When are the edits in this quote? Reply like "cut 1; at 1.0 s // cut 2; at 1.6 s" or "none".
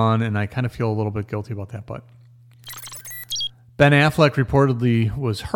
none